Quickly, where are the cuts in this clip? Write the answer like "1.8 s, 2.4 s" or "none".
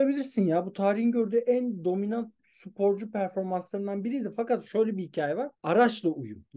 5.6 s